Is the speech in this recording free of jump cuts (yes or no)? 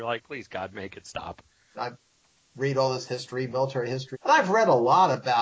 no